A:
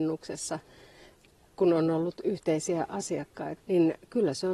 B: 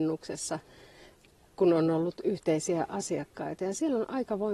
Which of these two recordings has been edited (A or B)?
A